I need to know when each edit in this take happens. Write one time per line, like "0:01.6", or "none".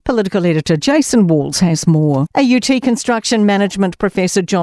0:02.3

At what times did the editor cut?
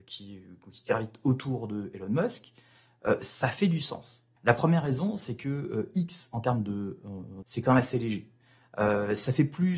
0:04.4
0:07.4

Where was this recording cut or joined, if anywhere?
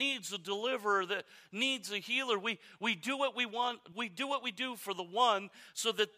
0:03.9

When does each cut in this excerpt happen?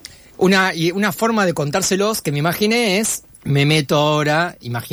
0:03.3

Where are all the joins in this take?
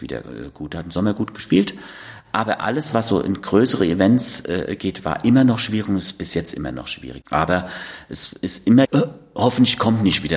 0:07.2
0:08.8

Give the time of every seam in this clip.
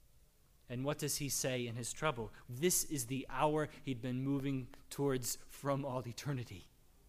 0:02.4

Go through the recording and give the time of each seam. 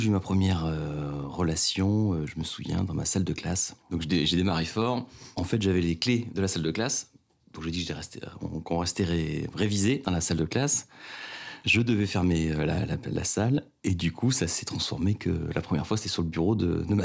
none

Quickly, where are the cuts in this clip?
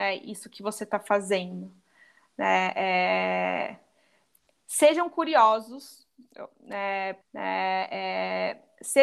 0:07.2

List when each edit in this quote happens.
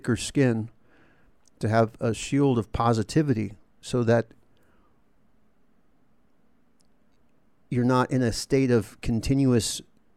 none

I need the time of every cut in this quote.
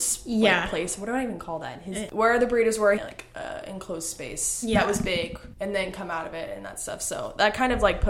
0:03.0

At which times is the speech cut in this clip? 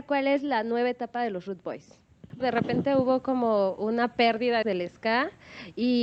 0:02.4
0:04.6

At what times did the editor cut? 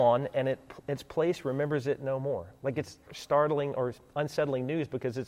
0:03.0

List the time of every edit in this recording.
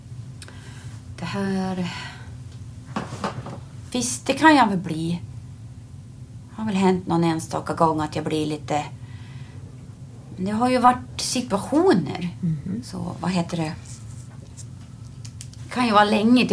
0:03.9
0:12.8
0:15.6

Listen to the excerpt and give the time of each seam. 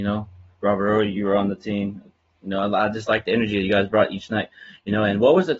none

